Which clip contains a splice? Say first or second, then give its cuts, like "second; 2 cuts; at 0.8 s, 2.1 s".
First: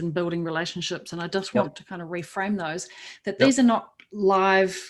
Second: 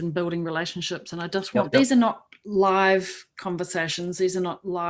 second; 1 cut; at 1.7 s